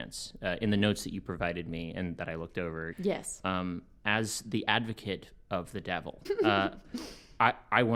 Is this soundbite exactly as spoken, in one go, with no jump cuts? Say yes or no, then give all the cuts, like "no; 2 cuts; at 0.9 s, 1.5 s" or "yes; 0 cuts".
no; 2 cuts; at 2.9 s, 6.2 s